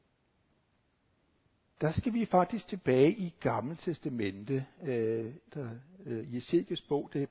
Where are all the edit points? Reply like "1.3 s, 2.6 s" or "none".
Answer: 1.7 s, 5.5 s